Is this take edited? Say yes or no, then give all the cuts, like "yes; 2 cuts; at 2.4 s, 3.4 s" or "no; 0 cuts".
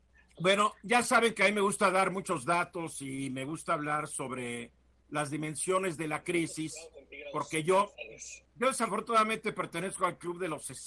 no; 0 cuts